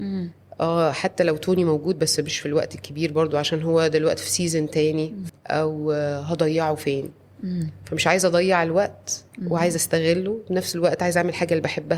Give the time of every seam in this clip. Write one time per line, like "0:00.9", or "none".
0:05.3